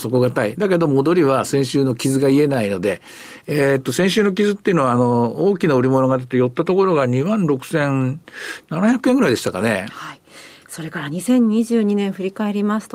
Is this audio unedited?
no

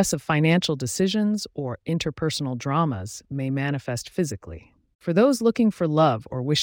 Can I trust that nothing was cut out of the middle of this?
no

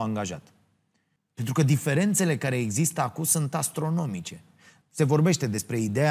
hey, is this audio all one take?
no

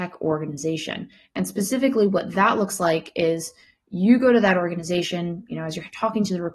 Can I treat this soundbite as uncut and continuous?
yes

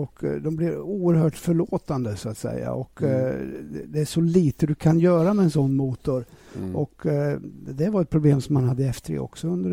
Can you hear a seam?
yes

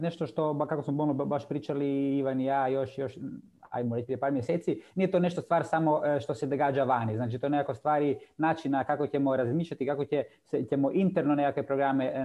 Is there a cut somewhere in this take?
no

